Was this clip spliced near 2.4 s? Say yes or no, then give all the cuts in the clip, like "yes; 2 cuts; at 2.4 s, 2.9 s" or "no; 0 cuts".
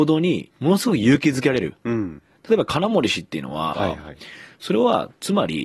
no; 1 cut; at 3.7 s